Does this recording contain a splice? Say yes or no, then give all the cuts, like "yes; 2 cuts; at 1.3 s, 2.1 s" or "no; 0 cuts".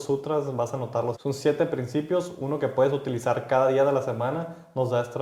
yes; 1 cut; at 1.1 s